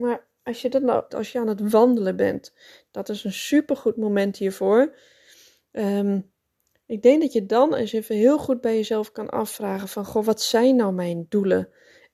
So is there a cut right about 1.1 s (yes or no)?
yes